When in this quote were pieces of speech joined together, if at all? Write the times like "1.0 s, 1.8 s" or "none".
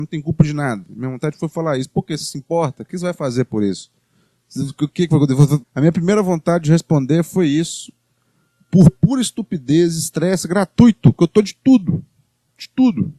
5.6 s